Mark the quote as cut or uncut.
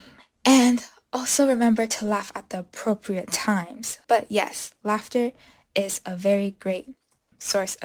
cut